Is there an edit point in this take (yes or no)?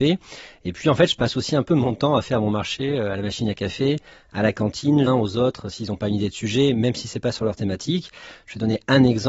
yes